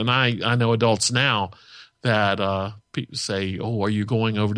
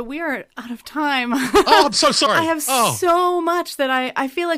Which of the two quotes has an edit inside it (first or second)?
second